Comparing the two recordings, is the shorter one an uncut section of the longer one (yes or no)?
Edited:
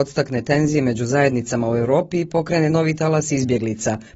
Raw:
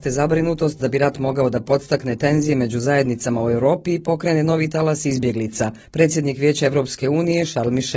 yes